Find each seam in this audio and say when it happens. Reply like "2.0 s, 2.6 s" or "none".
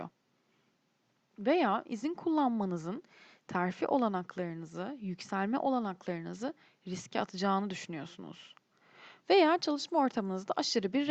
9.2 s